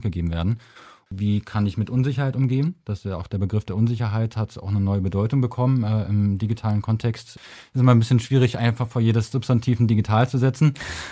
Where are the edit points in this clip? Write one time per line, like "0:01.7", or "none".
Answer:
none

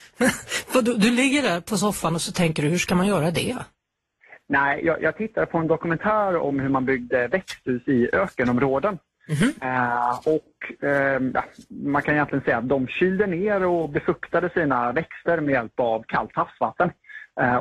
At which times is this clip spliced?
none

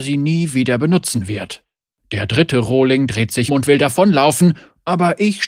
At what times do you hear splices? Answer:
0:03.5

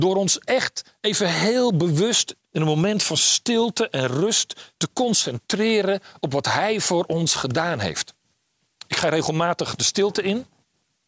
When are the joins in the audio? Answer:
0:02.4

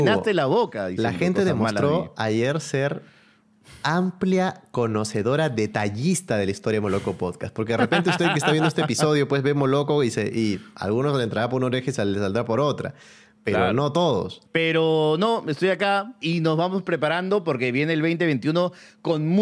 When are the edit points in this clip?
0:14.5
0:16.2

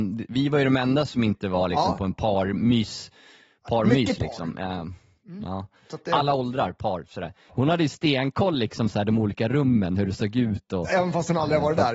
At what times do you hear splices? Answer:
0:07.5

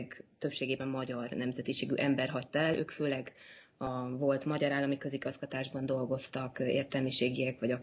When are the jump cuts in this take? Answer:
none

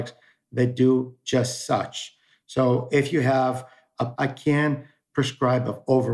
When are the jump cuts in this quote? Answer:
0:04.1

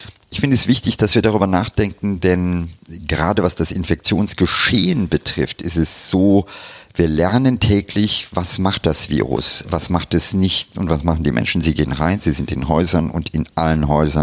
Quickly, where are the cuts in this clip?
0:09.6
0:10.7

